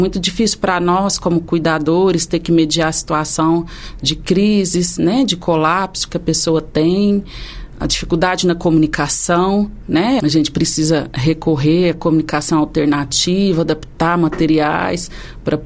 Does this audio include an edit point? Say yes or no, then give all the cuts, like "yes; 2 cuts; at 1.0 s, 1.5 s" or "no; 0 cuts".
yes; 1 cut; at 10.2 s